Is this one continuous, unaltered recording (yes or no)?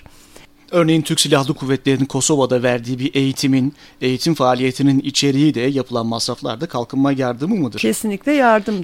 yes